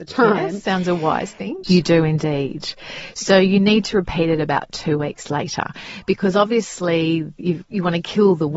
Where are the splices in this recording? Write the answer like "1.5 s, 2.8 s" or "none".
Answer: 1.6 s